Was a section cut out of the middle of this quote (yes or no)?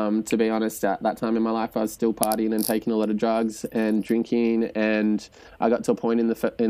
no